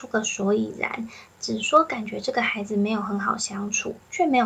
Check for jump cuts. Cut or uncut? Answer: uncut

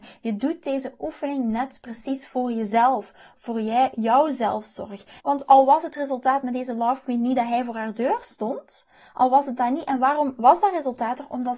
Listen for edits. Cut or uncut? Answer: cut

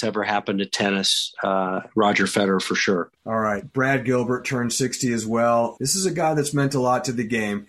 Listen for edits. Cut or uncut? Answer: cut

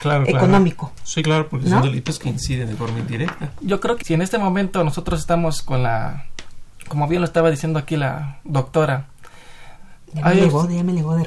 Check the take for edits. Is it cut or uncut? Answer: cut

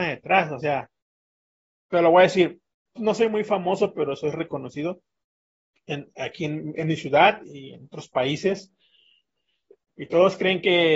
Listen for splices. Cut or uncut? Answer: cut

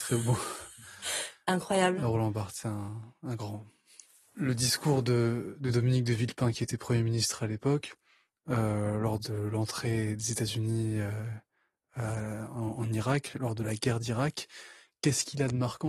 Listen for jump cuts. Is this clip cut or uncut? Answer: uncut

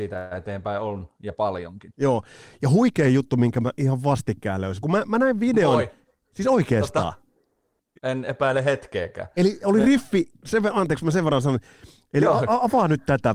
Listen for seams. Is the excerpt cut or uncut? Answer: cut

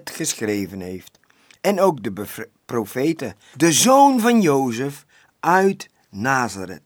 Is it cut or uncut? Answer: cut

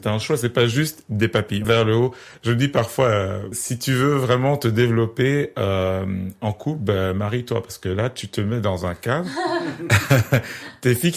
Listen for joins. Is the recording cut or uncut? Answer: cut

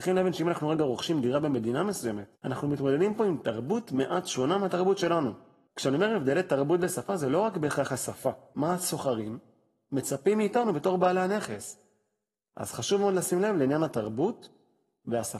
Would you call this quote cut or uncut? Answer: cut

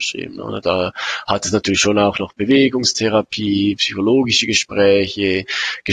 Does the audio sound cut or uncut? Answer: uncut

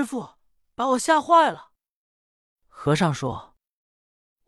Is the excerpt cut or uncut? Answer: uncut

